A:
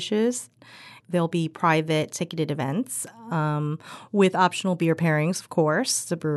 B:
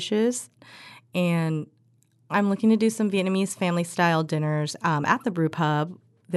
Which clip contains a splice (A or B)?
A